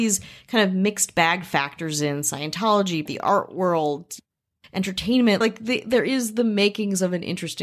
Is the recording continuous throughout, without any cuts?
no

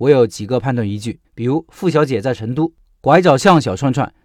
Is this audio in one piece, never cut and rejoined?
no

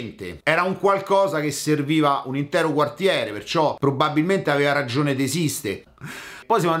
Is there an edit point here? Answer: yes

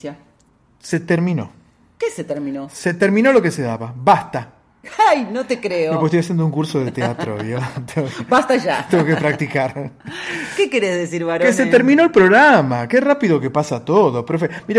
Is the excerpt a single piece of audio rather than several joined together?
yes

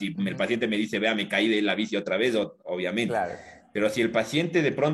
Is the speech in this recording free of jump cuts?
yes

